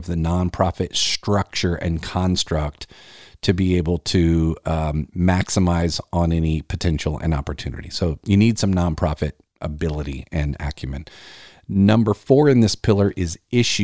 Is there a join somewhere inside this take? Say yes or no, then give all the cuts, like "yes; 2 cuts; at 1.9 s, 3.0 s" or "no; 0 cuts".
yes; 1 cut; at 5.1 s